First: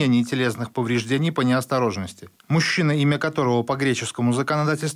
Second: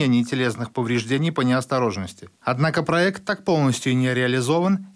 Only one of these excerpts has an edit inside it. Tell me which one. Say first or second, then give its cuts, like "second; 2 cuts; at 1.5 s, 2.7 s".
second; 1 cut; at 2.4 s